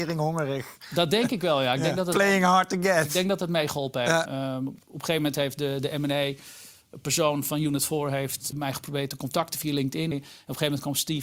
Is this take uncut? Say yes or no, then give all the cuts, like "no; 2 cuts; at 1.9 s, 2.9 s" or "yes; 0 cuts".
no; 3 cuts; at 4.3 s, 8.5 s, 10.1 s